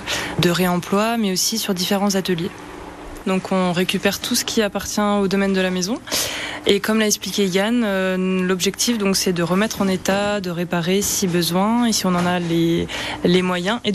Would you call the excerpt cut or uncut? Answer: cut